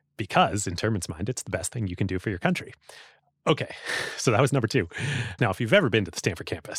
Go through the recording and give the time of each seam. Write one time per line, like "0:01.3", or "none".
0:05.4